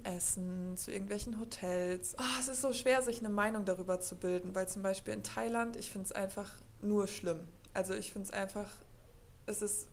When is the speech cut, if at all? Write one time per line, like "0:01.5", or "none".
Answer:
0:02.1